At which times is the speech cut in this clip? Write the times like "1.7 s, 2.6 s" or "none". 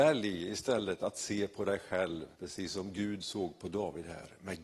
2.3 s